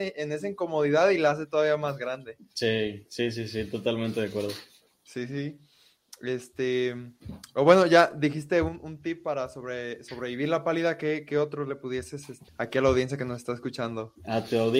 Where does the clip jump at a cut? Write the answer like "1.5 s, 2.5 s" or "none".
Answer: 12.5 s